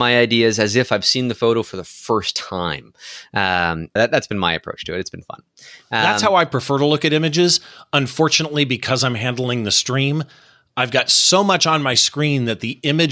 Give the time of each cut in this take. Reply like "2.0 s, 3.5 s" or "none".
4.0 s